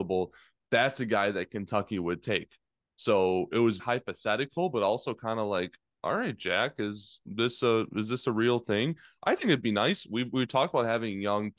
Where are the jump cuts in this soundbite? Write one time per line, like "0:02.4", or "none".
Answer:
0:03.8